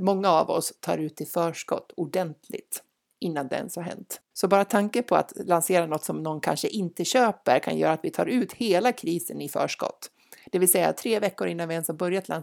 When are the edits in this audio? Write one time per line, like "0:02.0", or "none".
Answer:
0:04.3